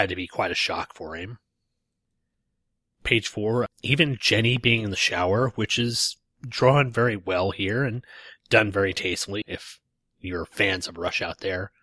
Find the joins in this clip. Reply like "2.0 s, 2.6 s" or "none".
3.7 s, 9.4 s

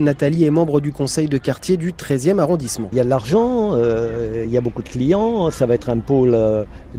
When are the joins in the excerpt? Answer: none

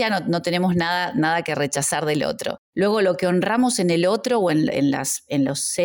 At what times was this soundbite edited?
2.6 s

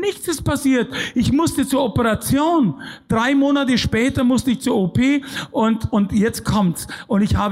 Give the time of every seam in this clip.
none

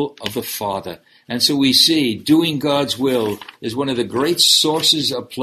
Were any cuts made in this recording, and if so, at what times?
none

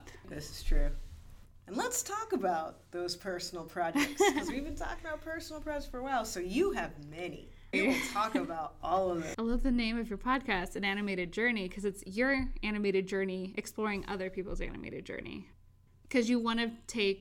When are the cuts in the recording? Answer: 7.7 s, 9.3 s

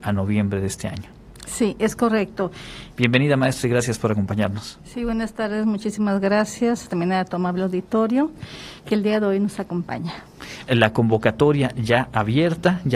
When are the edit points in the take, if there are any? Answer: 2.9 s, 10.7 s

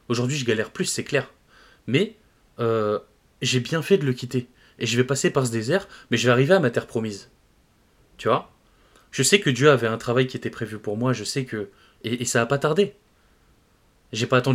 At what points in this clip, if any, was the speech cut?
none

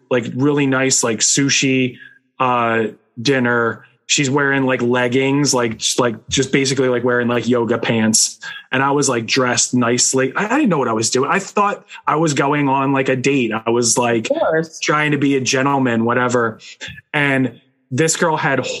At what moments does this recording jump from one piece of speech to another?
none

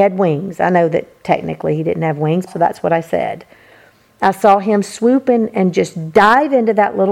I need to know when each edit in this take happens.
2.5 s

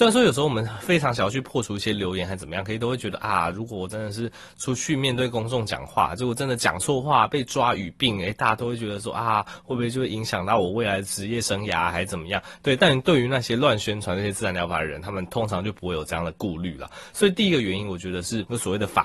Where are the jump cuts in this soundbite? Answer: 12.8 s

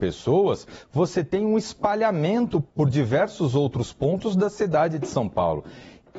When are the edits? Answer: 2.7 s

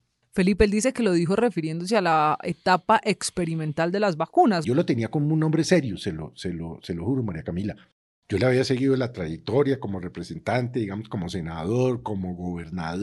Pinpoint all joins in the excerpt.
4.6 s

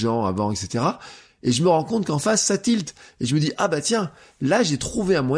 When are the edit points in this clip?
none

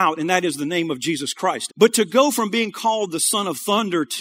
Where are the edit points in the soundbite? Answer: 1.7 s

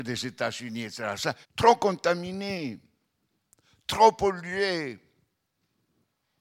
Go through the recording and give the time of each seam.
1.4 s

